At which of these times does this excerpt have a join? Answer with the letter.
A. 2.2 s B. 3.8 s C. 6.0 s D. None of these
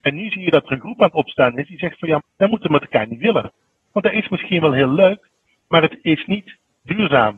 A